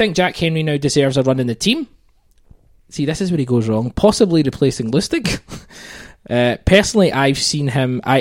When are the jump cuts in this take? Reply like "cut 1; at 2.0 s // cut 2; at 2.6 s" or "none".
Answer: none